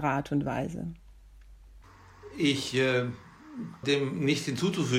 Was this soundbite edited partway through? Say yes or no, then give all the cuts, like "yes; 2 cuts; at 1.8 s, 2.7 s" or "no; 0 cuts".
yes; 1 cut; at 3.8 s